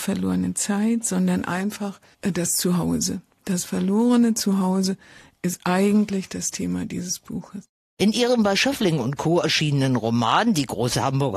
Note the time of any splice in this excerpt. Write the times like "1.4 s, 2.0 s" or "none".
none